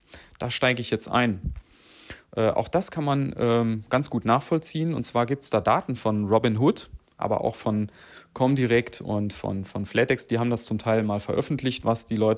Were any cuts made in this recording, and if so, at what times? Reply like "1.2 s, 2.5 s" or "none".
2.3 s

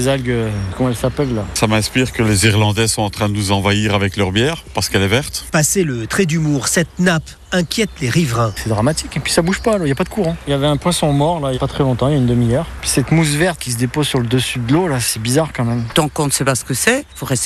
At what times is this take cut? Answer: 11.5 s, 12.8 s

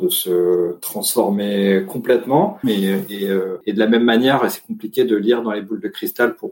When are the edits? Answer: 2.6 s

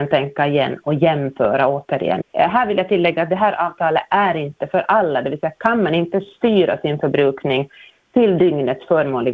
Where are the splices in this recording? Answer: 2.2 s

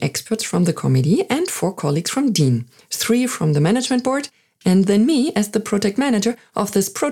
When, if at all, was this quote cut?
none

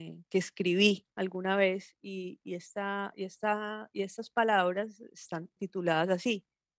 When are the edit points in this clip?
5.6 s

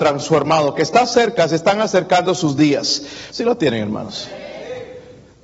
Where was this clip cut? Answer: 3.3 s

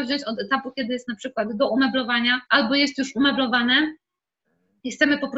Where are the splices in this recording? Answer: 2.5 s

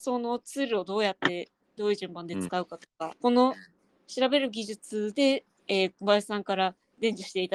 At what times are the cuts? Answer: 3.1 s

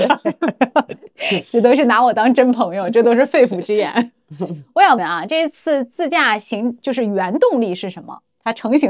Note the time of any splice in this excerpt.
5.0 s

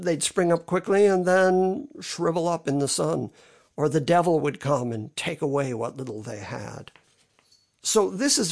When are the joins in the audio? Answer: none

